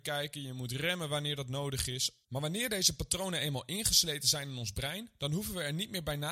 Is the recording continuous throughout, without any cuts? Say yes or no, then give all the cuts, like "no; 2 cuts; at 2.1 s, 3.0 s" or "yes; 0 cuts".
no; 1 cut; at 2.2 s